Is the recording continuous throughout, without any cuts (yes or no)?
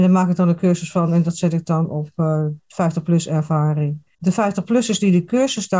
no